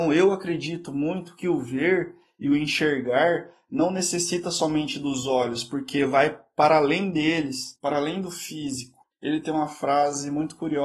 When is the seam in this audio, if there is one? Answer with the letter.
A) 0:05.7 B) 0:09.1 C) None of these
B